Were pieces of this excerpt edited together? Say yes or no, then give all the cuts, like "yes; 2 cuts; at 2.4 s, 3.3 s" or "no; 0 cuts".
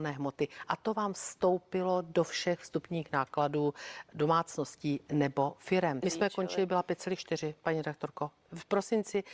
yes; 1 cut; at 6.0 s